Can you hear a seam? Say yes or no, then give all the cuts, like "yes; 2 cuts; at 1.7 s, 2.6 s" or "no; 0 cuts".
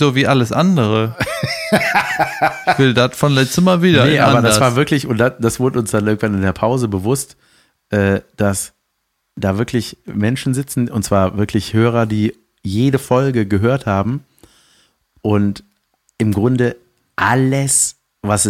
no; 0 cuts